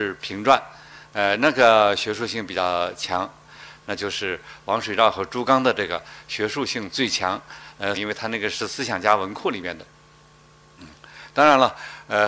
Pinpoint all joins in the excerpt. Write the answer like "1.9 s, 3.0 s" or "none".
3.8 s, 7.9 s